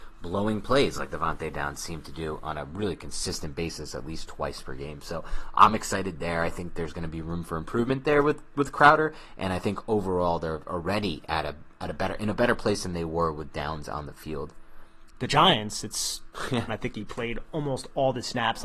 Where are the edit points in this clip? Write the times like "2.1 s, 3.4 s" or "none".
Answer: 15.1 s, 16.7 s